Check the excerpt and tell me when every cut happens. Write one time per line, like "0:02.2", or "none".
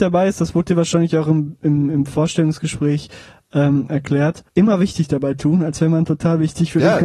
0:04.5